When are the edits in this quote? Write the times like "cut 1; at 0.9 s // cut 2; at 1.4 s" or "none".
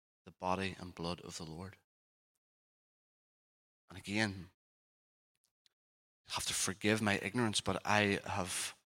none